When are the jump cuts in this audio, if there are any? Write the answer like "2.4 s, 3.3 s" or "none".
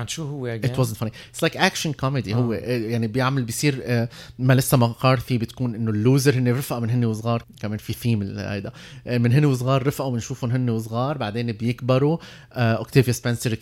7.4 s